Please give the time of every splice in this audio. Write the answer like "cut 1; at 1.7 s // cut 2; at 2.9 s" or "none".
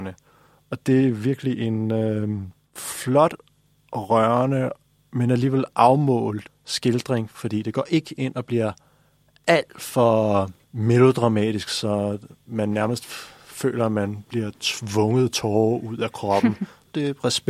none